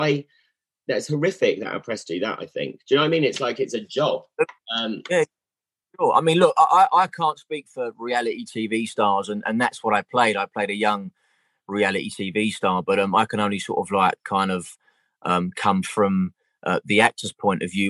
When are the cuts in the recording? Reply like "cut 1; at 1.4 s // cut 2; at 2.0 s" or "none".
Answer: none